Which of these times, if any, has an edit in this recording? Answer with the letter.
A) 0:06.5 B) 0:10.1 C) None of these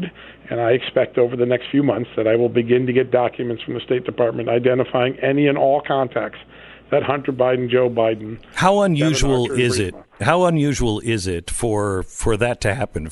C